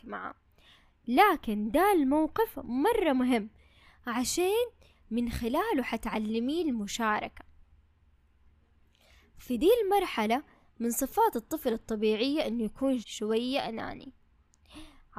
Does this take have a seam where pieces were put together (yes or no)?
yes